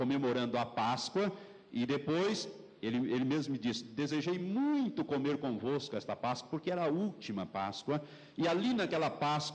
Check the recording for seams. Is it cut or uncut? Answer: uncut